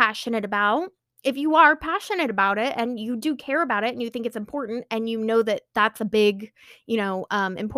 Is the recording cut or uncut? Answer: uncut